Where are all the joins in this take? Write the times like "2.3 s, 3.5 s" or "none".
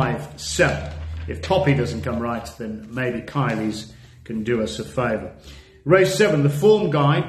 none

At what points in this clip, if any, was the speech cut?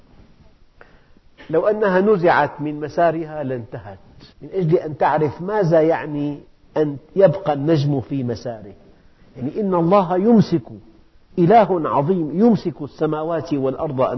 4.3 s

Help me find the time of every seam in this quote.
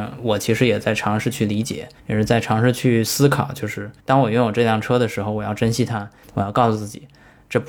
2.0 s, 4.0 s, 6.2 s

